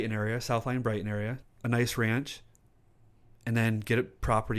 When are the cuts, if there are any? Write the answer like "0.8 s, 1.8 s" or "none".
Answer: 1.4 s